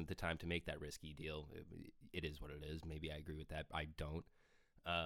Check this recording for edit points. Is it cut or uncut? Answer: uncut